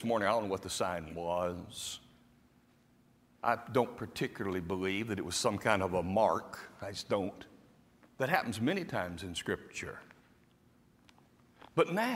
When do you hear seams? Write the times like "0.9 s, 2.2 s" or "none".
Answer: 8.0 s

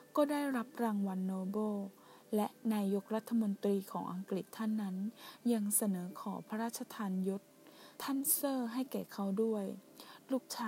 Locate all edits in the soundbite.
7.9 s

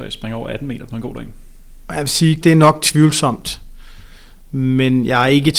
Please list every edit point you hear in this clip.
2.4 s

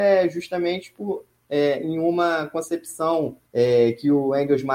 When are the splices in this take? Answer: 3.5 s

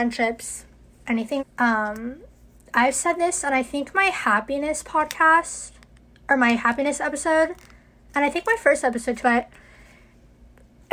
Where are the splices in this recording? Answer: 1.4 s, 9.2 s

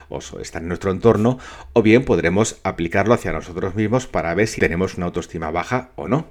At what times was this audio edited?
4.6 s

